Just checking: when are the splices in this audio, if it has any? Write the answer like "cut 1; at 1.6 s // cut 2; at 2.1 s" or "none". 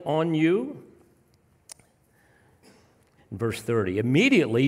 cut 1; at 3.2 s